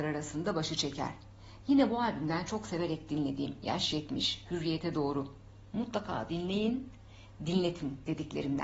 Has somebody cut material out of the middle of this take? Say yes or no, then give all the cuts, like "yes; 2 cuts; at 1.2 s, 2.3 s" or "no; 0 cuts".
no; 0 cuts